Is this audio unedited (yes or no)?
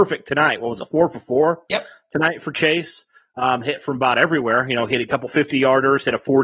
yes